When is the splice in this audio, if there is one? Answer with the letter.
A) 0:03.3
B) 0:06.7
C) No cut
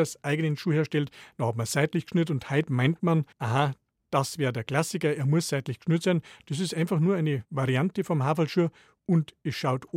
A